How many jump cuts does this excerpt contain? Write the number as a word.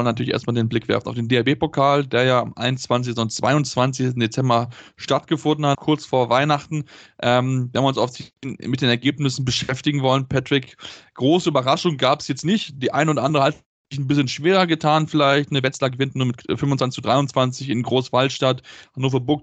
one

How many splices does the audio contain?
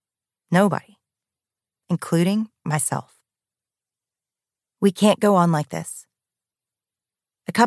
zero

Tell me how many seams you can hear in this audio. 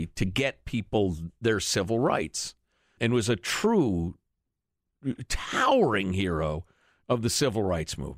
one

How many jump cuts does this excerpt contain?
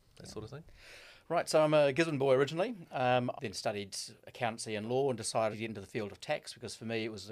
two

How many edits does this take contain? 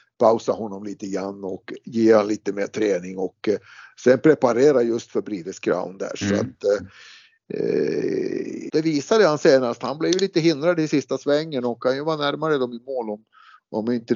one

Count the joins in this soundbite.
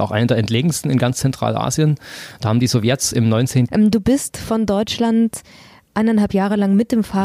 one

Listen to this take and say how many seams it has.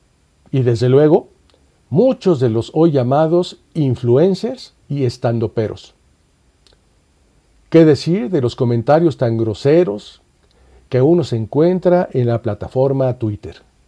one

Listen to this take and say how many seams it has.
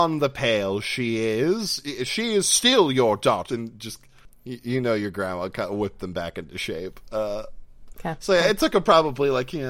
one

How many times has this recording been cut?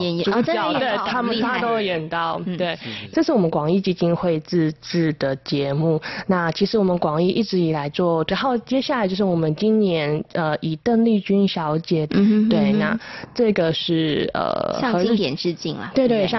three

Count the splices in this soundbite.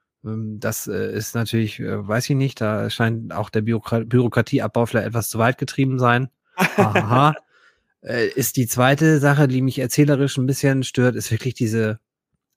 zero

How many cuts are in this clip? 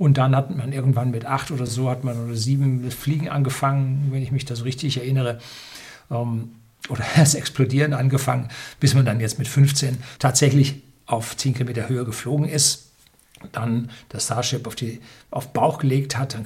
zero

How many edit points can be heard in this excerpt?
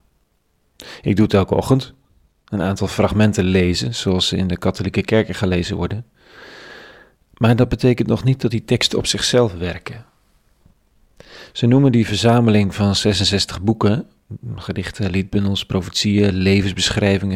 zero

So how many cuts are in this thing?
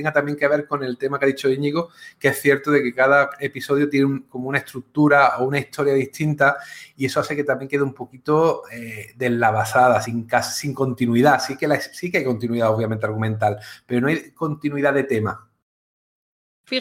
zero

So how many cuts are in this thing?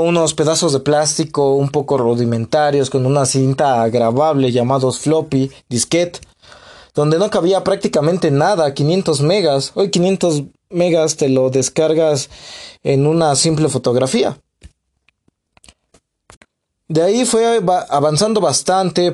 zero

